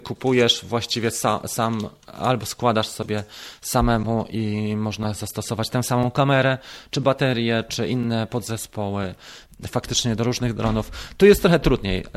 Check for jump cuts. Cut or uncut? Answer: uncut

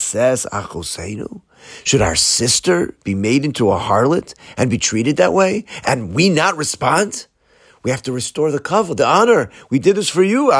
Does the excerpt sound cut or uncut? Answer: uncut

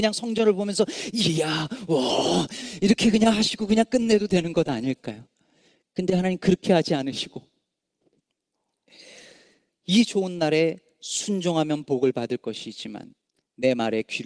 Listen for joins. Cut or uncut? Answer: uncut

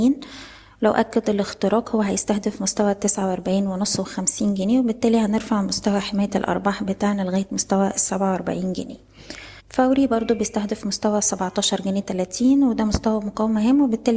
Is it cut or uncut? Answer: cut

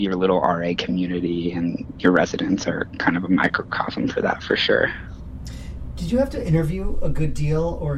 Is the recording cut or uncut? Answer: uncut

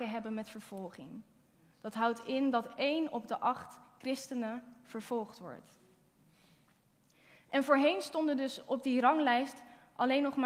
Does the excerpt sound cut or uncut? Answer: uncut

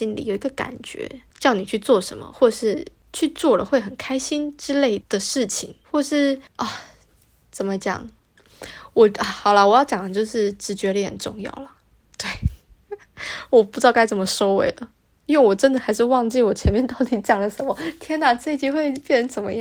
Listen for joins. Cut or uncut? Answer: cut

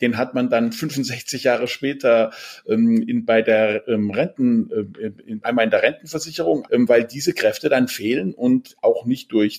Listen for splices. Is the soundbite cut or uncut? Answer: cut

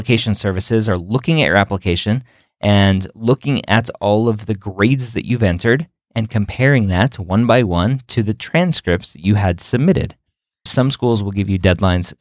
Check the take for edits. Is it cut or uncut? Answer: cut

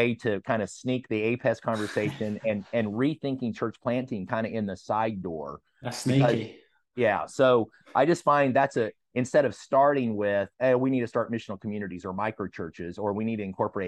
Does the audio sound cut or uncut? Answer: uncut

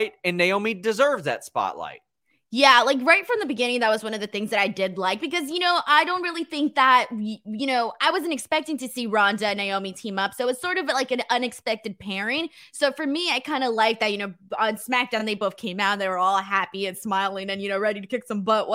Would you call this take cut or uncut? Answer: uncut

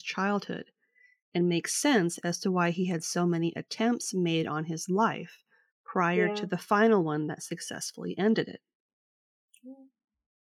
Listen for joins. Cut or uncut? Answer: uncut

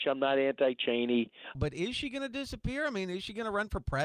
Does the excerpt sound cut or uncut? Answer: cut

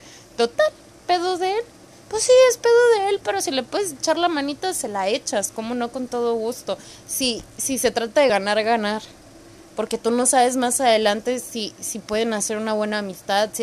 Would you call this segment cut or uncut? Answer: uncut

